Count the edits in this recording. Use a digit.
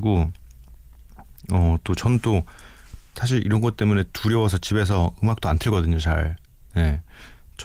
0